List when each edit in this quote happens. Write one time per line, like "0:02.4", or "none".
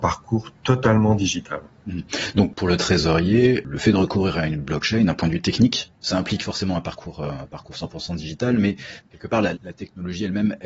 0:09.5